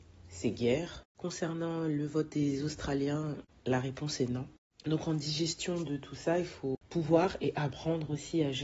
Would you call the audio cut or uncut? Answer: uncut